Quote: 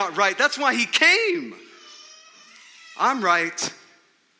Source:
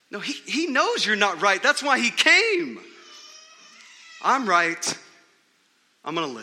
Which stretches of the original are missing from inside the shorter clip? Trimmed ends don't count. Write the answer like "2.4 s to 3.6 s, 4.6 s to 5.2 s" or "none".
none